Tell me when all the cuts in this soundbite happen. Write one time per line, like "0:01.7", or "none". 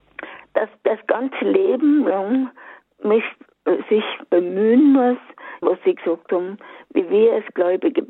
0:05.6